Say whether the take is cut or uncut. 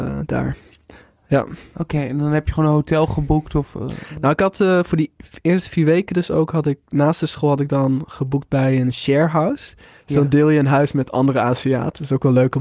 uncut